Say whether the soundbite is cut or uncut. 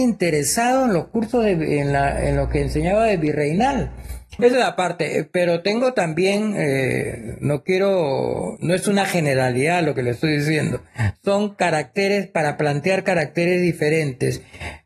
cut